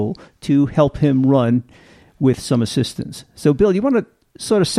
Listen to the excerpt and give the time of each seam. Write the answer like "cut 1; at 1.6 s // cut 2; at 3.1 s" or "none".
none